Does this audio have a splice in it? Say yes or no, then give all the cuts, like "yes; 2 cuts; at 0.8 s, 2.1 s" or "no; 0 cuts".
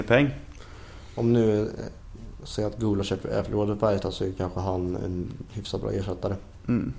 no; 0 cuts